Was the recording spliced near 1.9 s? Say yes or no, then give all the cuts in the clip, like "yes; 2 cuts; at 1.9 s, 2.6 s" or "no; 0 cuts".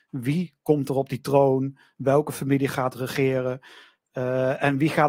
no; 0 cuts